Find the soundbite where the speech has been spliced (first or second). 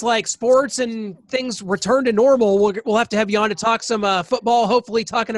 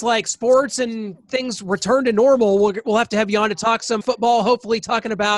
second